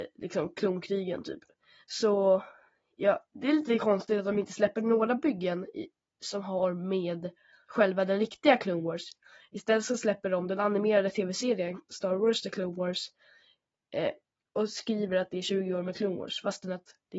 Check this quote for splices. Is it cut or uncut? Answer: cut